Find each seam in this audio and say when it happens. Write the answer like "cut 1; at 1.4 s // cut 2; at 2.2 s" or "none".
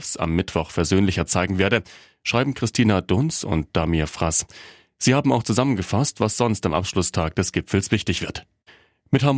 none

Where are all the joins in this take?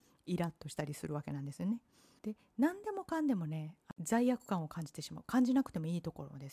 cut 1; at 2.2 s

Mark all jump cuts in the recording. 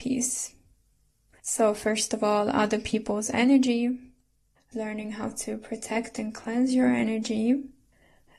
cut 1; at 4.7 s

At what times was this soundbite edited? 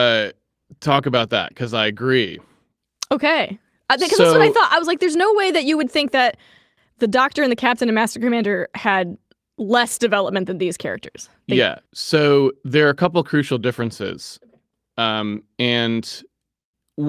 cut 1; at 11.9 s

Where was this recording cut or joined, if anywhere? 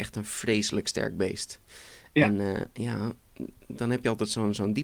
none

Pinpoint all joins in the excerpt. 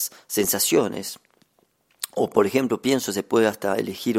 none

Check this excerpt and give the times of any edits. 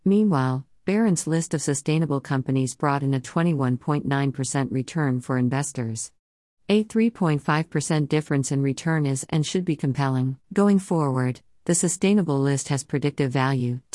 cut 1; at 10.4 s

